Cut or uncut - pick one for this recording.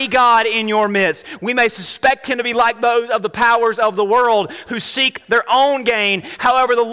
uncut